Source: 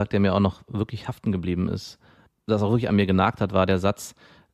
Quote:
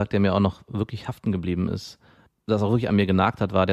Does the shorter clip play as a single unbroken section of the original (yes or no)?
yes